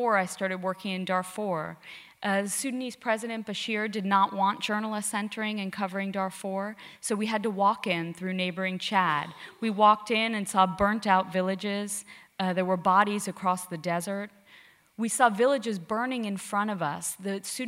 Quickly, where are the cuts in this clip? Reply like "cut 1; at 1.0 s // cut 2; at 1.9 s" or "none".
none